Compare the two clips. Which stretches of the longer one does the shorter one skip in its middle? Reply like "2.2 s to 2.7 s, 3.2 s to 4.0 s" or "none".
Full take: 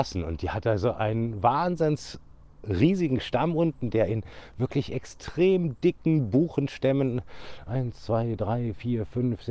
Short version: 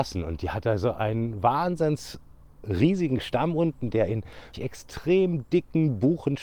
4.5 s to 4.8 s